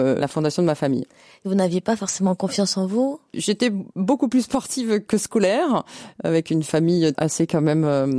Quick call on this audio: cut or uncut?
cut